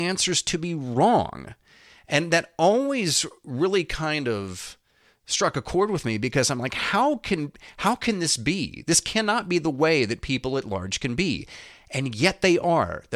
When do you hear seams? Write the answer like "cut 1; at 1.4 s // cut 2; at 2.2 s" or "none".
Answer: none